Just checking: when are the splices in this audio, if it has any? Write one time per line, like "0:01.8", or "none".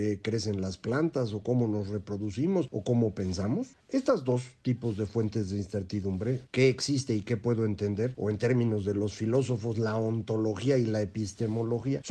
0:03.8